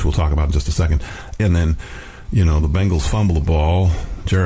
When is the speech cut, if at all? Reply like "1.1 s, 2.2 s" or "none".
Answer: 1.4 s